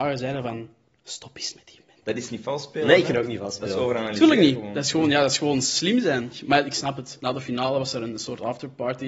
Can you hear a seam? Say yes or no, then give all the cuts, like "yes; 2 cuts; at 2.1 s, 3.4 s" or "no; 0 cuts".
yes; 1 cut; at 2.0 s